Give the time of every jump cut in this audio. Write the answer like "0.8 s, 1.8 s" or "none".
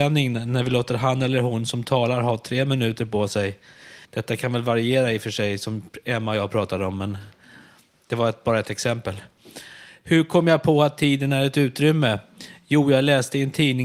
4.0 s